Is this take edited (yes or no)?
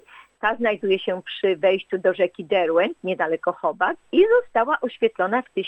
yes